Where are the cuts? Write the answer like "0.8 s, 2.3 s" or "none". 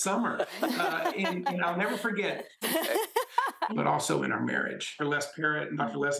2.6 s, 3.7 s, 5.0 s